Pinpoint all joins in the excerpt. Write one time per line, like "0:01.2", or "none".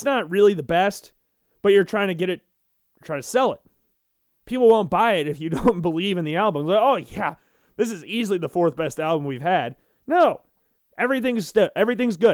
0:10.8